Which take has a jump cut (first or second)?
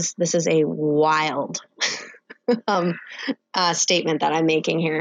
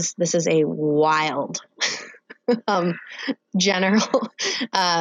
first